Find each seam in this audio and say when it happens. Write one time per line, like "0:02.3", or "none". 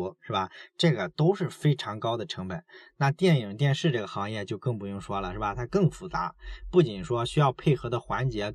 none